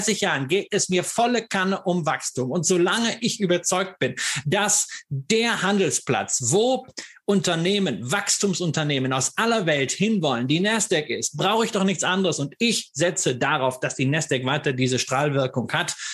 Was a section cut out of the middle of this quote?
no; 0 cuts

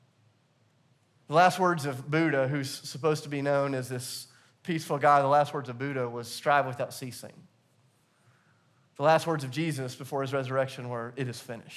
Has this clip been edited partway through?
no; 0 cuts

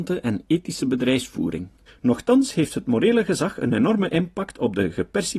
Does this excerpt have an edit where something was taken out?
yes; 1 cut; at 1.9 s

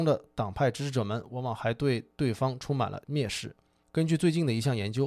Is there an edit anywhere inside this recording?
no; 0 cuts

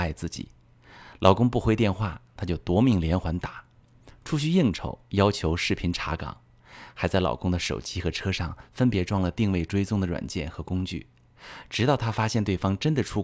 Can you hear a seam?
no; 0 cuts

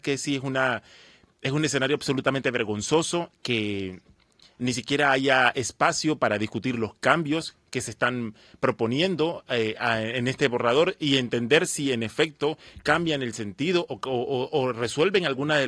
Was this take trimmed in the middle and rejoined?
no; 0 cuts

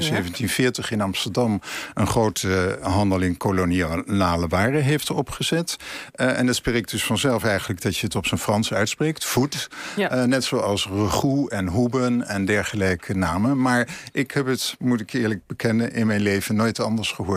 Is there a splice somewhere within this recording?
no; 0 cuts

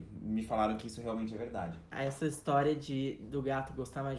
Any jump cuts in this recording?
yes; 1 cut; at 1.9 s

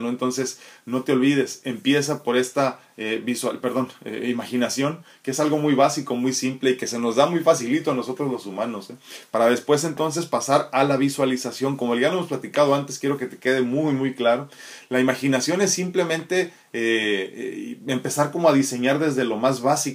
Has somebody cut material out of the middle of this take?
no; 0 cuts

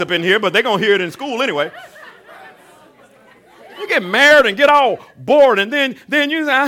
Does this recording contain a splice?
no; 0 cuts

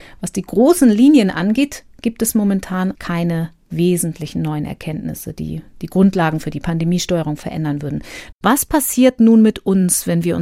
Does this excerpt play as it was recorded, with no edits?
no; 2 cuts; at 2.9 s, 8.3 s

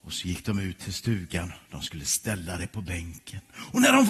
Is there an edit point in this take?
no; 0 cuts

